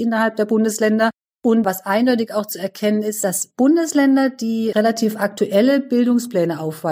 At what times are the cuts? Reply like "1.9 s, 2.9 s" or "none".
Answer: none